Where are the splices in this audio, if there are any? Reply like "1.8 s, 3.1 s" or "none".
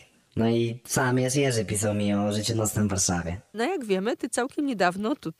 3.5 s